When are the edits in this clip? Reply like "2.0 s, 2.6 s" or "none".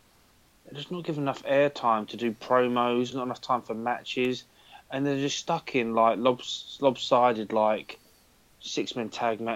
3.1 s